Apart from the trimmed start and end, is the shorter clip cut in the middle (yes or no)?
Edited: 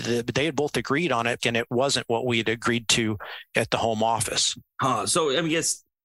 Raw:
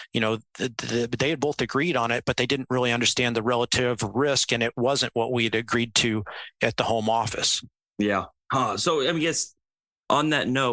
yes